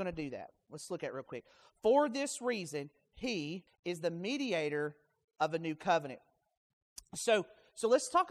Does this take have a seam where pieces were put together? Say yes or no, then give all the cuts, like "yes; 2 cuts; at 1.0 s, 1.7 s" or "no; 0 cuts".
yes; 1 cut; at 3.7 s